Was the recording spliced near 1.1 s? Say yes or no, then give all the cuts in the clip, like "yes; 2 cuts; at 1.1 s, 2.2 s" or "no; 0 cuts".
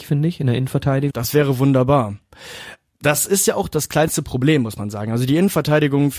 yes; 1 cut; at 1.1 s